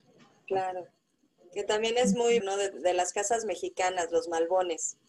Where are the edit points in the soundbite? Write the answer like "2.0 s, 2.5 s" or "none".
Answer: 2.4 s